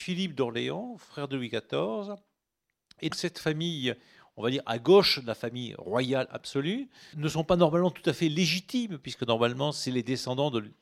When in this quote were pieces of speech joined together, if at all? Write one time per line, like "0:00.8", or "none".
0:03.1
0:07.1